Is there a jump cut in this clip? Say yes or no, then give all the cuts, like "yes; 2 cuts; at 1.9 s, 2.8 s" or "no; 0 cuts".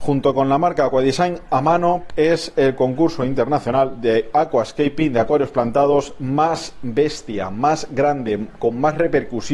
yes; 1 cut; at 2.1 s